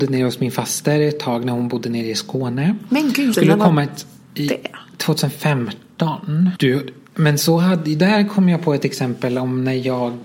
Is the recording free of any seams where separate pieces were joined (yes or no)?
no